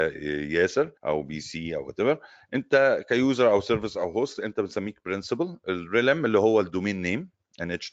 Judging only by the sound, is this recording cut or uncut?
cut